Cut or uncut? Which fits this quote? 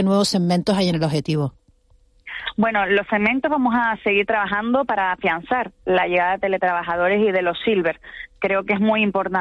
uncut